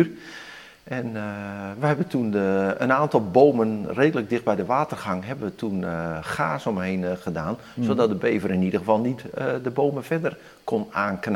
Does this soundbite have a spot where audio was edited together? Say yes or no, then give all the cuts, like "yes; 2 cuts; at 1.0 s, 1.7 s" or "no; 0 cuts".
no; 0 cuts